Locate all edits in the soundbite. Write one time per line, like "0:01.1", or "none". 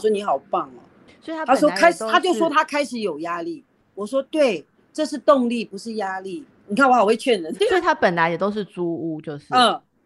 0:07.6